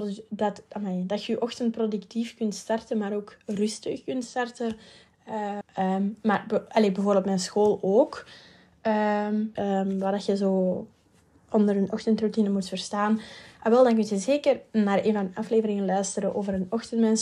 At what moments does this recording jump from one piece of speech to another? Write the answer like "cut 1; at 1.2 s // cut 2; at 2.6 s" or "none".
cut 1; at 5.6 s // cut 2; at 9.6 s